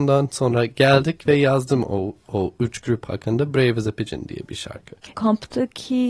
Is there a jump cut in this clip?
yes; 1 cut; at 5.1 s

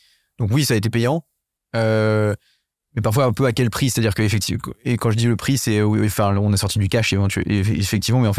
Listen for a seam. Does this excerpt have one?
no; 0 cuts

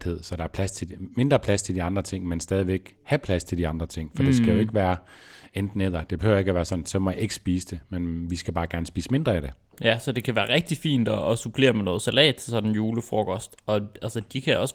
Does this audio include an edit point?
no; 0 cuts

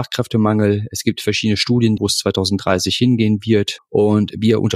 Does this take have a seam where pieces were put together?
yes; 2 cuts; at 2.0 s, 3.8 s

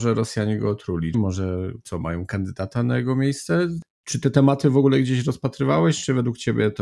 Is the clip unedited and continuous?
no; 1 cut; at 1.1 s

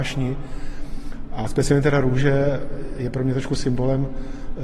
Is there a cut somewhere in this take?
no; 0 cuts

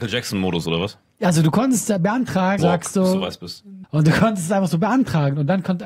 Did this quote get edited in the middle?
yes; 2 cuts; at 2.6 s, 3.8 s

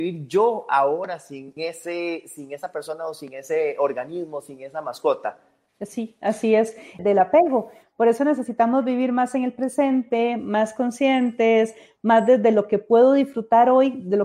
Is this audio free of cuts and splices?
no; 2 cuts; at 1.6 s, 7.0 s

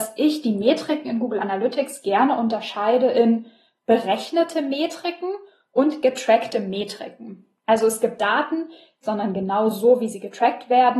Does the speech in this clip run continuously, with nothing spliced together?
no; 1 cut; at 9.0 s

